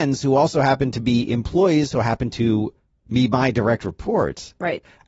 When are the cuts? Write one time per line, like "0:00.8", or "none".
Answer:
0:01.9